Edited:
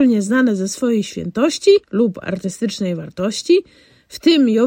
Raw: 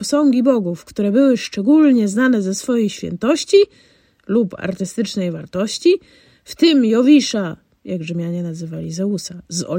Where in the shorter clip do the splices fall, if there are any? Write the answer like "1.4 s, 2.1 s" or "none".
1.8 s